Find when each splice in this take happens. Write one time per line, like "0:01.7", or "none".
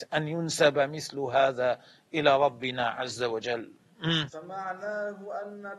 0:04.3